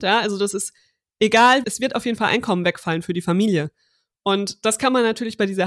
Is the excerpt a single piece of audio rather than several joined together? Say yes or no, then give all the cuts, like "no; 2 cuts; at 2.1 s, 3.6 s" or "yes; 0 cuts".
no; 1 cut; at 1.6 s